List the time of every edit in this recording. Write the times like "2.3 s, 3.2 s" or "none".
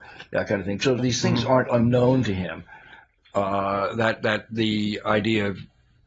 1.0 s

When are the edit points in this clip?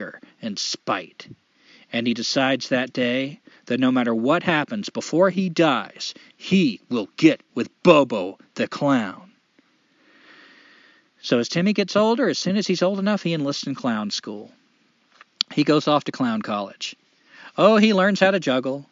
7.5 s

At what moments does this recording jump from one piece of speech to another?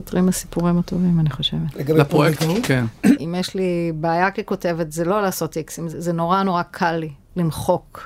1.7 s, 3.1 s

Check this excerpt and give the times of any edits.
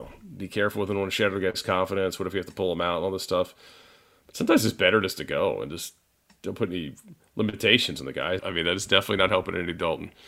8.4 s

